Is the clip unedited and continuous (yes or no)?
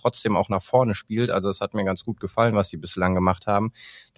yes